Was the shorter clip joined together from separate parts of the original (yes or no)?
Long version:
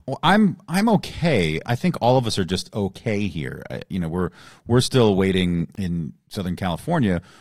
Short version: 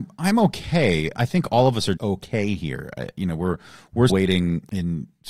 yes